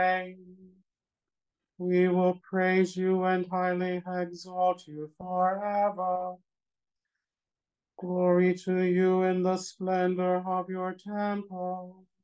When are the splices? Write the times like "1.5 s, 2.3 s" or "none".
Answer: none